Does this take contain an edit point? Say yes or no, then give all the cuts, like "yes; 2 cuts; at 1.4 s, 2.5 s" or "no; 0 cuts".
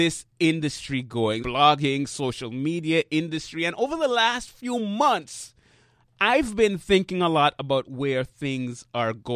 yes; 1 cut; at 1.4 s